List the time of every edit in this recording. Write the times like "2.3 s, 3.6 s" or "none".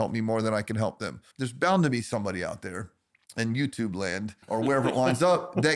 1.3 s, 4.4 s

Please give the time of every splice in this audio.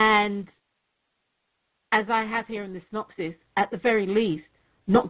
none

